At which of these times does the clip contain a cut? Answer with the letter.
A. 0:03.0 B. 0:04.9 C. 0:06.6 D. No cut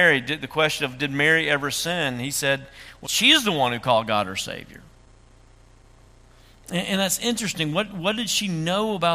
A